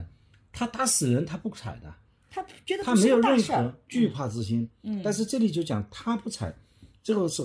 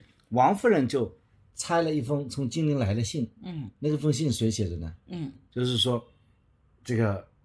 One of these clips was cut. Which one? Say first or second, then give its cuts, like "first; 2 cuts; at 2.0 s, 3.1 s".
second; 1 cut; at 5.3 s